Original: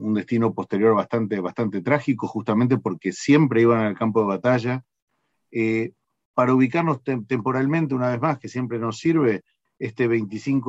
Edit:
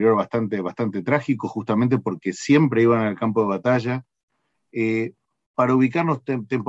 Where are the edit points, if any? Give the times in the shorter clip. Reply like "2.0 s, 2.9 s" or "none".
none